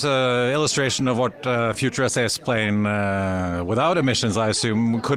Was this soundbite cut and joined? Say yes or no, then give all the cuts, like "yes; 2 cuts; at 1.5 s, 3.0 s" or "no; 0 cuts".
no; 0 cuts